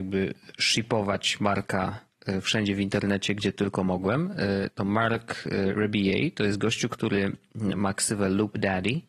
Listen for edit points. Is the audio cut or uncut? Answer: uncut